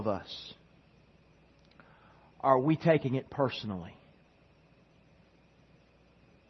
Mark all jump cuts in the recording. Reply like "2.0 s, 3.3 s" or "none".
none